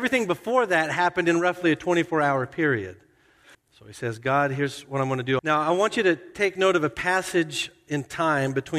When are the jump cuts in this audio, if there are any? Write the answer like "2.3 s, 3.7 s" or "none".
3.5 s, 5.4 s